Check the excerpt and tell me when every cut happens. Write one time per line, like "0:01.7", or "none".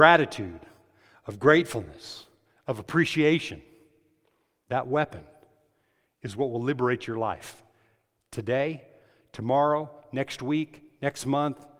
none